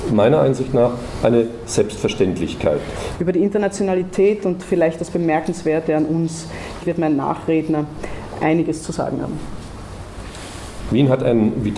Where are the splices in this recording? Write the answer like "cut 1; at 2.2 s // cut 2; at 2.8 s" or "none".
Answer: cut 1; at 3.1 s // cut 2; at 6.8 s // cut 3; at 10.9 s